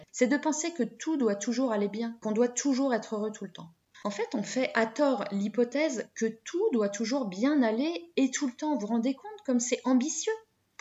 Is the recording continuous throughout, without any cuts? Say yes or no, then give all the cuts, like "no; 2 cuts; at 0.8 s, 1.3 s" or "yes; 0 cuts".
no; 1 cut; at 3.9 s